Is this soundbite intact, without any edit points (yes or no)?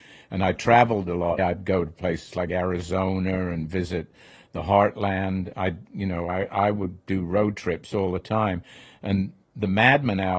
no